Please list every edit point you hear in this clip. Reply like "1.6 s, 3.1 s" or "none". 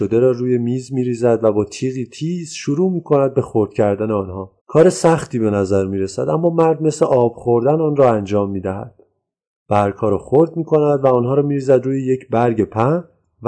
4.6 s